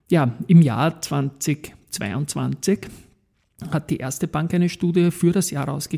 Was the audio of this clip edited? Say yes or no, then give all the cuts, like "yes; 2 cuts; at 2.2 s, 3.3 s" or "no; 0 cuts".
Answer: no; 0 cuts